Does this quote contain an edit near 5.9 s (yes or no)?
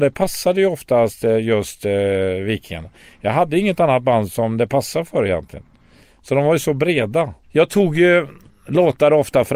no